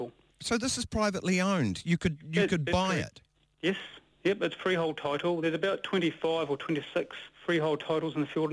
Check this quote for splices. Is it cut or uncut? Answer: uncut